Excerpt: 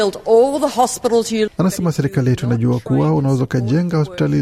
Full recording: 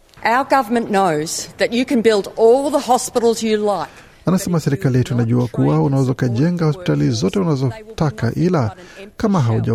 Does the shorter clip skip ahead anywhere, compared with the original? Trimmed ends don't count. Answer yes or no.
yes